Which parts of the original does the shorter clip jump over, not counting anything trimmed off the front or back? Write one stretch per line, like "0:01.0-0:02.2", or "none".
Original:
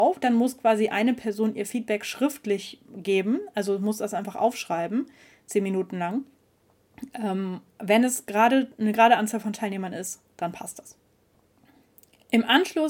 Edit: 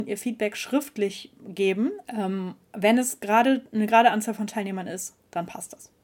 0:03.5-0:07.1

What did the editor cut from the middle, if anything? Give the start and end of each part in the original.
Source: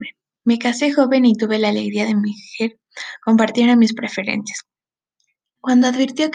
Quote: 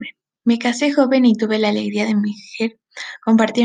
none

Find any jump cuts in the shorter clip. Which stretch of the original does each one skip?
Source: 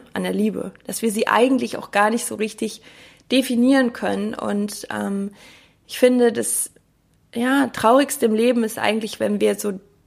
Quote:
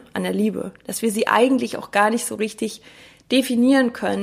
none

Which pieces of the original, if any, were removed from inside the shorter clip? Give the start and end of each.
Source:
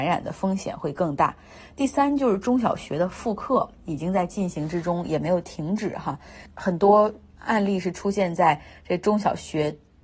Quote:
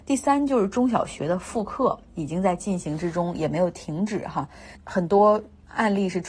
none

